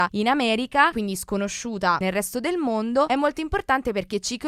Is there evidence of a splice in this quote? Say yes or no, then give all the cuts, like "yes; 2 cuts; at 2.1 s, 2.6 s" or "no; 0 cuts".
yes; 1 cut; at 3.1 s